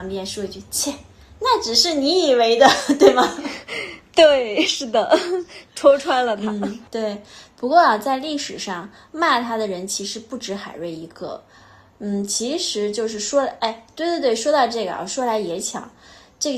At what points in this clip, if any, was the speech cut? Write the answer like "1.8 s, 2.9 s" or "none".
6.9 s